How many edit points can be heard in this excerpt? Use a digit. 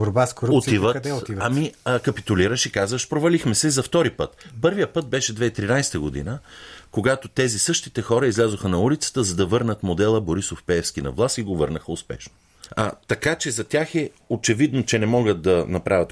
1